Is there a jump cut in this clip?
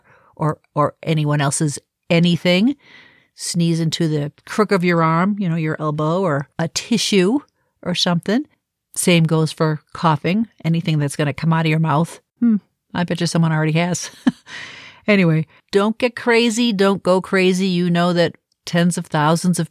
yes; 1 cut; at 12.3 s

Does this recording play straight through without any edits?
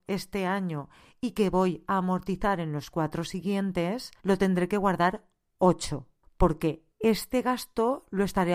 no; 1 cut; at 4.2 s

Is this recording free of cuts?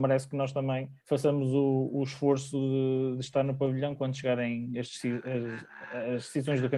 no; 1 cut; at 1.0 s

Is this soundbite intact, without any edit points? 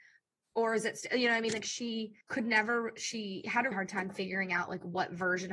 no; 2 cuts; at 2.2 s, 3.7 s

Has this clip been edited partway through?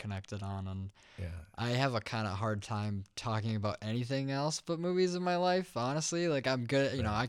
no; 0 cuts

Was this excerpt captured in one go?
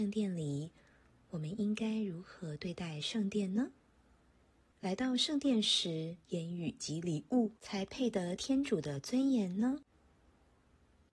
no; 3 cuts; at 4.7 s, 6.2 s, 7.6 s

